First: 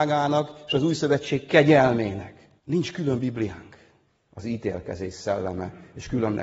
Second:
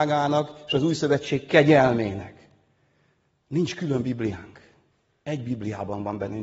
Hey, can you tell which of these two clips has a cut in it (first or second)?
first